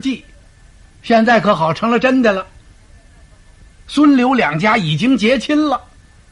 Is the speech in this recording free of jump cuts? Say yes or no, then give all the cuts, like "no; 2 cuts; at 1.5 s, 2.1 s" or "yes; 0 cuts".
yes; 0 cuts